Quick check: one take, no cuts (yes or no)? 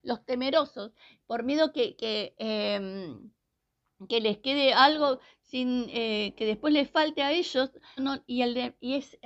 no